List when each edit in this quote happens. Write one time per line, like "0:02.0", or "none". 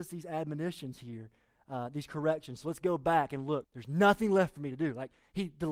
0:03.6